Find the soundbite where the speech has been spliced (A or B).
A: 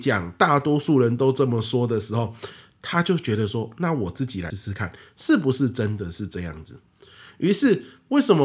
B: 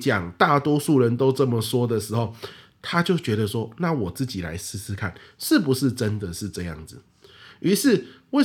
A